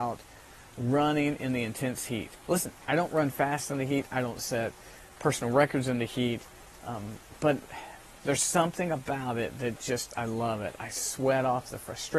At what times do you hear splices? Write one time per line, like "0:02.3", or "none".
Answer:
none